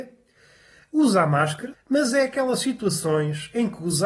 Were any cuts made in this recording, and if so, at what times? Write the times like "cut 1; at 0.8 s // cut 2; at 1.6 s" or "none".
cut 1; at 1.7 s